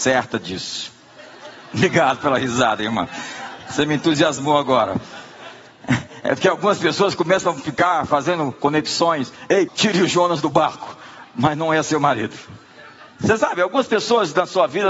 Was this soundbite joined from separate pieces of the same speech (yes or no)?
yes